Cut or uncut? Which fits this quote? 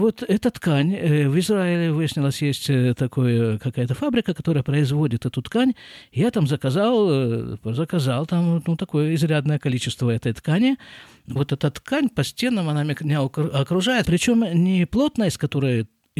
cut